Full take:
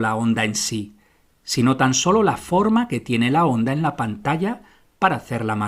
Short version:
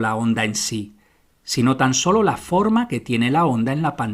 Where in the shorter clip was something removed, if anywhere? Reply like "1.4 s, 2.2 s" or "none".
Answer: none